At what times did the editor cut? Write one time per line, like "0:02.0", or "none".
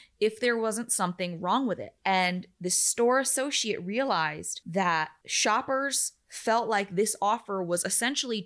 0:02.0